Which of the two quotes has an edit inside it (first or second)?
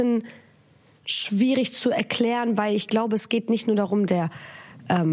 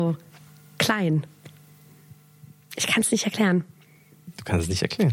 first